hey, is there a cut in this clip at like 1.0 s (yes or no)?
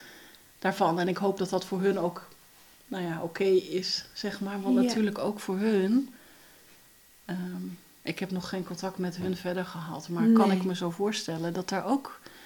no